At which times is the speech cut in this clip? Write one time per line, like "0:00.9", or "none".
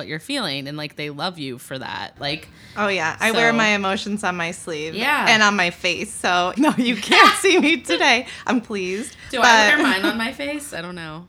0:06.6
0:08.6